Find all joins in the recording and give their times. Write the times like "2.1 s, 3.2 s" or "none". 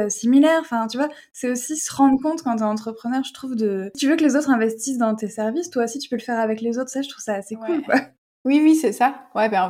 none